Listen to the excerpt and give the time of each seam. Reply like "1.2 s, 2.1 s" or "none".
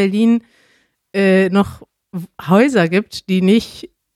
none